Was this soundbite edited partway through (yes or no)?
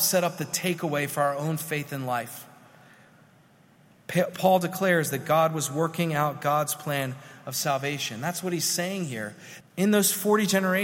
yes